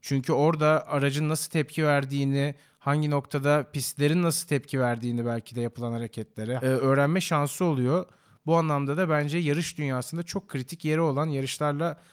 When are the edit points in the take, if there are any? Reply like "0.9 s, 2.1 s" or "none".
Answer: 6.6 s